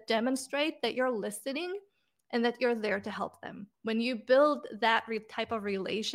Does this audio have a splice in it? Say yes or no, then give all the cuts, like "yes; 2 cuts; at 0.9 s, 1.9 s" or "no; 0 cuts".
yes; 1 cut; at 3.7 s